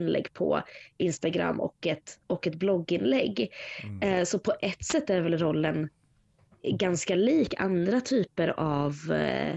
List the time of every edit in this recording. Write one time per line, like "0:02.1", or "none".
none